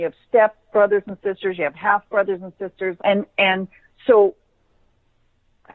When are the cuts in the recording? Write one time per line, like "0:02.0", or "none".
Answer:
0:03.0